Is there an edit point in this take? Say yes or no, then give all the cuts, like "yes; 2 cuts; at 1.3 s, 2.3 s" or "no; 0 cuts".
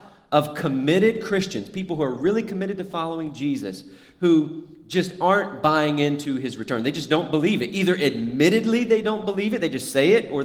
no; 0 cuts